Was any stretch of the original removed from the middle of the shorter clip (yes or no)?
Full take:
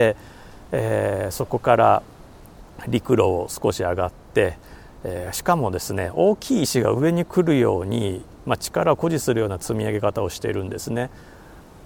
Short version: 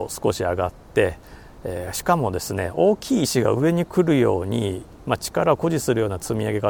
no